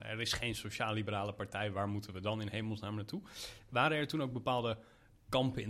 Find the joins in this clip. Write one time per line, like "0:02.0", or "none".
none